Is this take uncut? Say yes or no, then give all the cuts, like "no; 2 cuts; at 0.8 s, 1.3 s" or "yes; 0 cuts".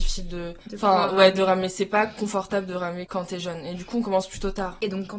no; 1 cut; at 3.1 s